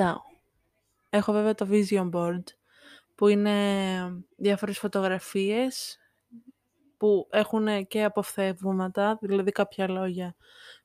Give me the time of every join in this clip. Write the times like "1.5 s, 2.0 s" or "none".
1.1 s, 4.3 s